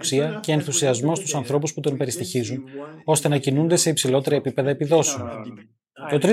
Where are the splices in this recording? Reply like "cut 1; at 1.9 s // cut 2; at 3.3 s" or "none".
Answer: none